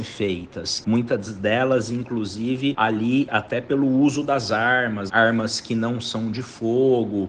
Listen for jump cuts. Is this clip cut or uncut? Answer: cut